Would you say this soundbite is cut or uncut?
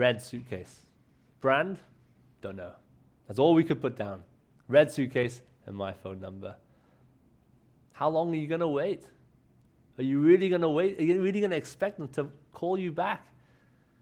uncut